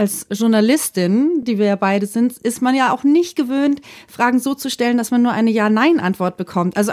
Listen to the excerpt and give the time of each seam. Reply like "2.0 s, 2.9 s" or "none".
none